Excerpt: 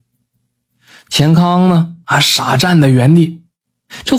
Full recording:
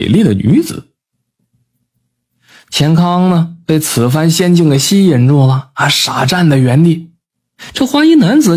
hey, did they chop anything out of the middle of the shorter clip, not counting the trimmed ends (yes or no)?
yes